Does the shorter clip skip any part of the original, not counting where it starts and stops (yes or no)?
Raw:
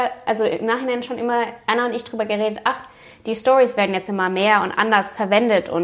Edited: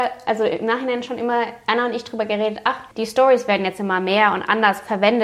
yes